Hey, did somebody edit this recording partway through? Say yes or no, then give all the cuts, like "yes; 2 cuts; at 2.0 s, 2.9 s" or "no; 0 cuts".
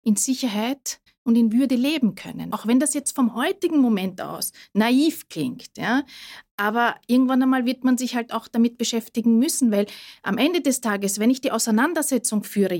yes; 1 cut; at 2.5 s